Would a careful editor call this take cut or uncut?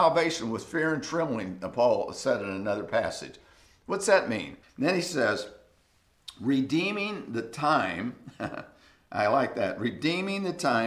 cut